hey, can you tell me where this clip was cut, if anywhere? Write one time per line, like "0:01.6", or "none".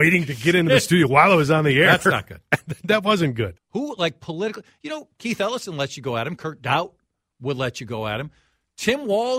0:03.6